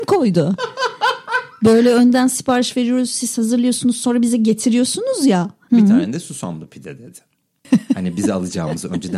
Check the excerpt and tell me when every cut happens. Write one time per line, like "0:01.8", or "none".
0:05.7
0:07.6